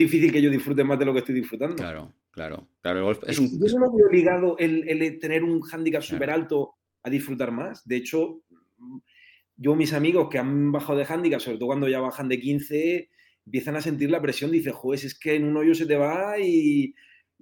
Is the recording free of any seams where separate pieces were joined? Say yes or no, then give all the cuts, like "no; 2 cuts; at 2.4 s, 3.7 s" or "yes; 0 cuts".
yes; 0 cuts